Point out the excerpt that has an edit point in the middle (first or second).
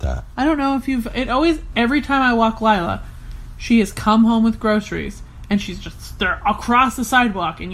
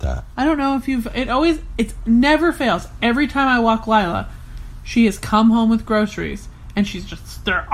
first